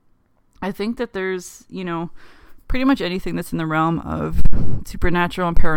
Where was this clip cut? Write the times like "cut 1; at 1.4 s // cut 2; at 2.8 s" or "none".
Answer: none